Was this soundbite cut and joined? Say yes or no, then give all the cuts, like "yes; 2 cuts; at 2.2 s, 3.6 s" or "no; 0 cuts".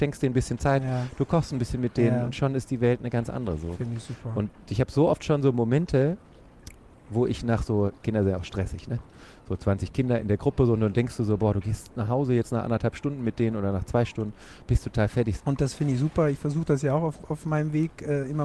yes; 1 cut; at 15.4 s